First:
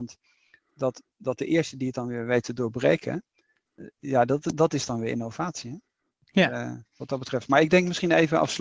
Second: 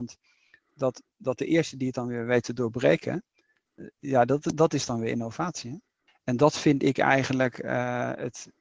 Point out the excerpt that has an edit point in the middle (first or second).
second